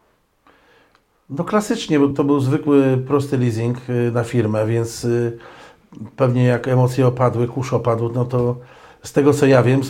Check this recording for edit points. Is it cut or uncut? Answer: cut